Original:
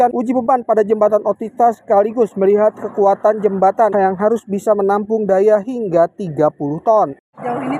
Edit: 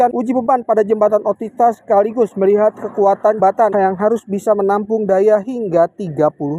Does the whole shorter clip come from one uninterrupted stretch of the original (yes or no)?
no